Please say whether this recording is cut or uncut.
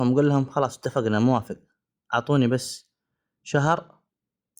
uncut